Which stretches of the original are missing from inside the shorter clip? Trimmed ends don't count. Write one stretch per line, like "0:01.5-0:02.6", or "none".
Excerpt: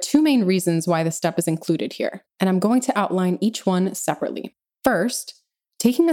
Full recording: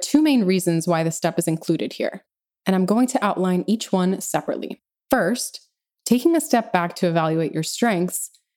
0:02.3-0:02.6